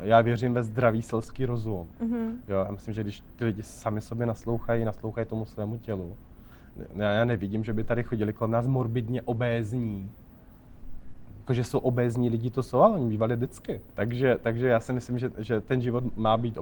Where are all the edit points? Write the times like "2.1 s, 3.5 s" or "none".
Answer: 13.9 s